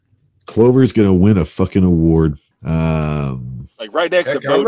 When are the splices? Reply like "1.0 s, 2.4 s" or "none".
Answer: 2.5 s

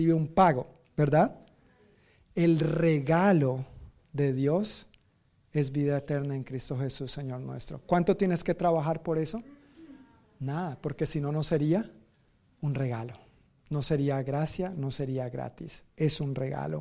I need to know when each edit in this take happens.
none

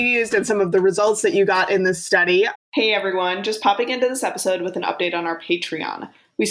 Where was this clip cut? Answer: 2.5 s

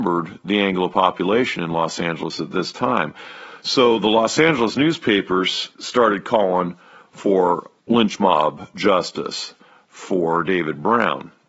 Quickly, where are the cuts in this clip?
5.7 s, 7.8 s

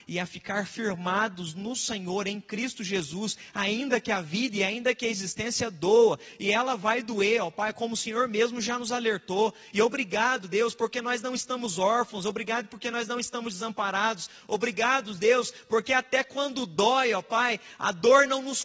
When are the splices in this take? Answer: none

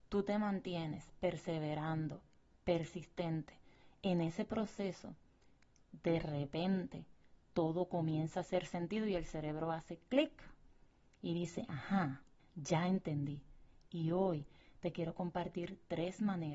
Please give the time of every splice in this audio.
12.4 s, 13.9 s

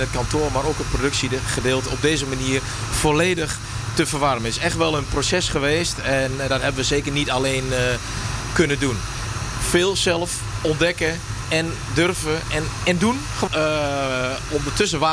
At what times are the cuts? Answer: 12.5 s, 13.5 s

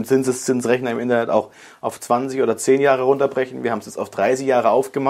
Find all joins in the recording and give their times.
none

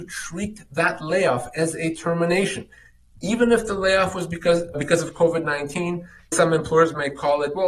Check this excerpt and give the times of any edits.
4.7 s, 6.3 s

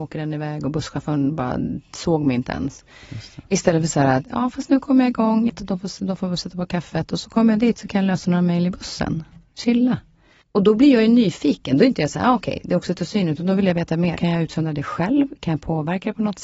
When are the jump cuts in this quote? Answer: 5.5 s, 10.4 s, 14.2 s

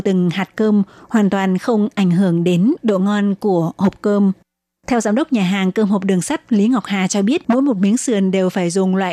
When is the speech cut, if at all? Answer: 4.8 s, 7.4 s

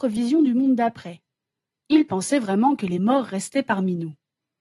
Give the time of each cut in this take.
none

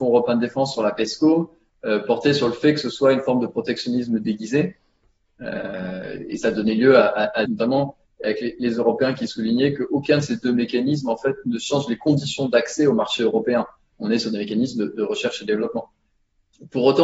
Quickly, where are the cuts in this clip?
7.5 s

